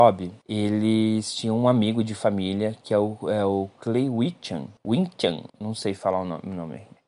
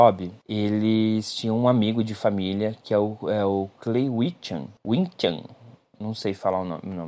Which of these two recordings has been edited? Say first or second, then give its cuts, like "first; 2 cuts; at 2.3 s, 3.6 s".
first; 1 cut; at 5.5 s